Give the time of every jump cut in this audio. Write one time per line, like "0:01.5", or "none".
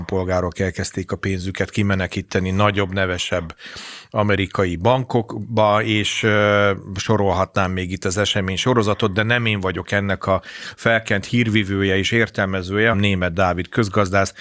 0:12.9